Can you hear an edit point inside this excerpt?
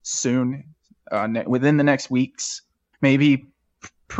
yes; 2 cuts; at 1.4 s, 2.9 s

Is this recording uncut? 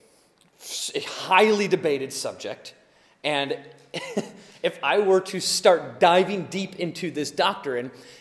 yes; 0 cuts

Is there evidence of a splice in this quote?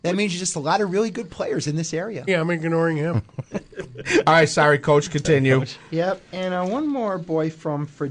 yes; 1 cut; at 2.3 s

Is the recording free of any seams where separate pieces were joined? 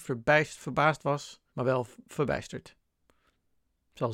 no; 1 cut; at 1.5 s

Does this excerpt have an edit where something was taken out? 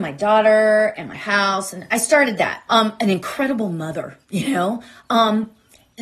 yes; 2 cuts; at 2.7 s, 4.2 s

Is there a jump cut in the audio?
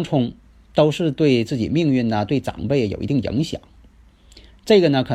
no; 0 cuts

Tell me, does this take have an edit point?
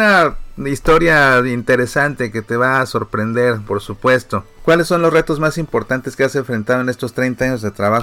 yes; 1 cut; at 3.6 s

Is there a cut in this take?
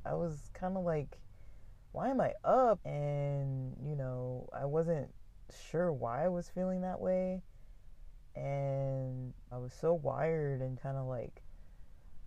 yes; 3 cuts; at 2.8 s, 9.5 s, 10.8 s

